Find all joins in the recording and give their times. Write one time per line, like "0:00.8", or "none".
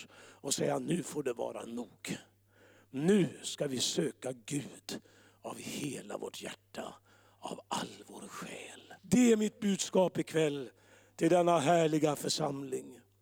0:09.0

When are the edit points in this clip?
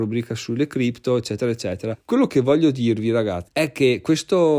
0:01.9
0:03.5

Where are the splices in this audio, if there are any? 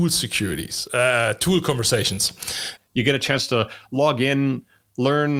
0:02.8

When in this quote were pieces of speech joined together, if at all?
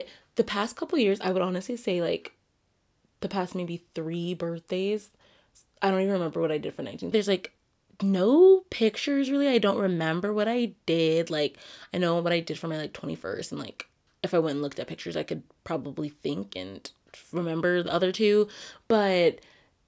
0:07.1

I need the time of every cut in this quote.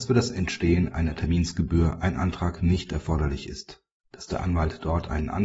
0:04.0

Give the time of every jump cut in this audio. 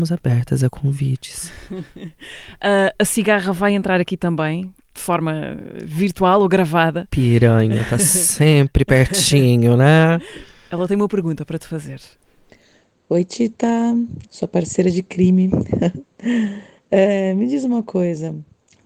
0:14.2

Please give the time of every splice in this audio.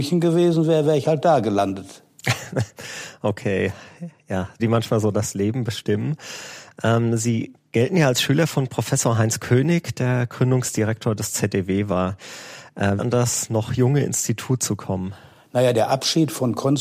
0:04.6
0:13.0

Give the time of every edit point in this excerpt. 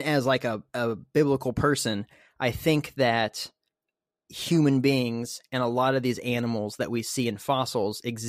none

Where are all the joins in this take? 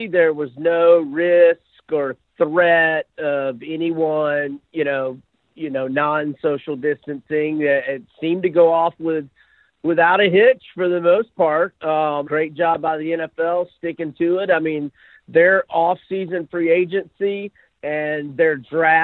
0:12.3

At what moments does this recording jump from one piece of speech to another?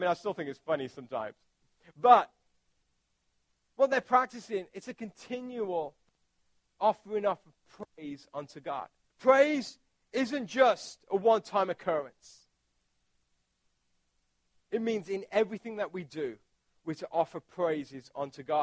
0:09.1

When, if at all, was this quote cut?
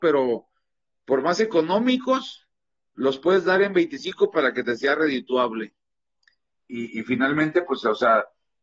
0:06.6

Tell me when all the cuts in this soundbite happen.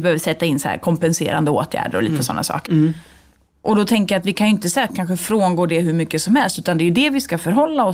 0:02.7

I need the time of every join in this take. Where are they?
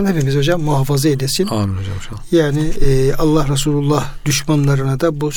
none

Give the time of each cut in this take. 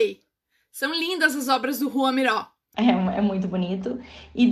0:02.7

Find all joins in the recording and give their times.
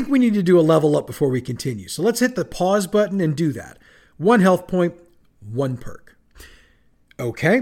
0:05.2

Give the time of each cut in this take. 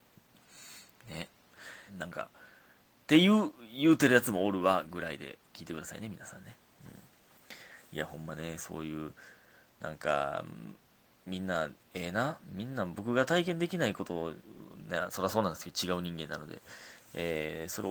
0:01.9

